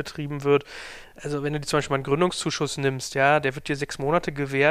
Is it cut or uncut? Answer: uncut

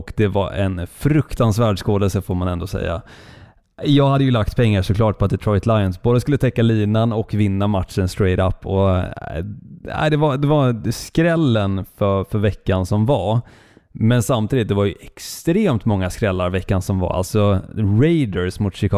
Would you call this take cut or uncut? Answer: uncut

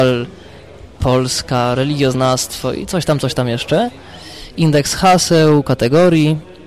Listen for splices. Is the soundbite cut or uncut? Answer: uncut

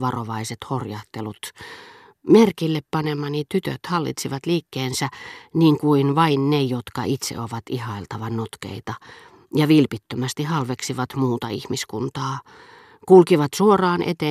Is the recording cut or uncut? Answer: uncut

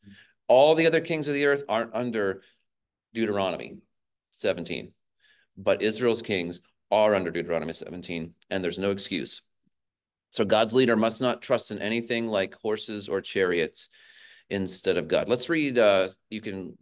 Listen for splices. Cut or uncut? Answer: uncut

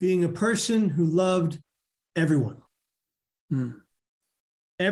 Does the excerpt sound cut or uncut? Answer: uncut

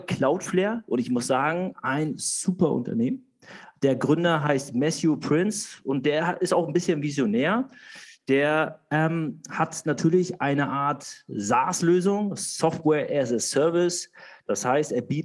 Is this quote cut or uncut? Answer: uncut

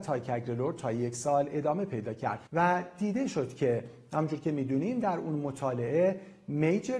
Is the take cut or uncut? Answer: cut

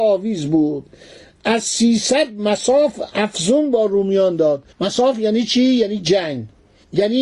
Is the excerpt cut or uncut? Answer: cut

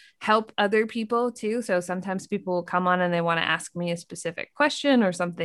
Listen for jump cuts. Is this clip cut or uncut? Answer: uncut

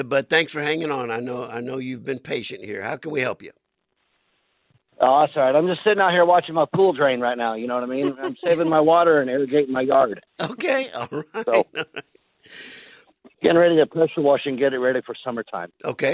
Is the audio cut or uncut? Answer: uncut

